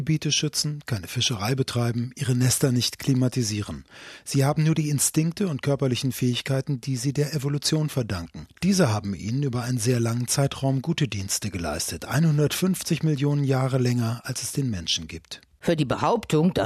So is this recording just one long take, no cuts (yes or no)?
yes